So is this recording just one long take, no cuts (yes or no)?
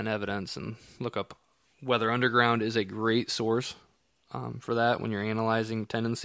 yes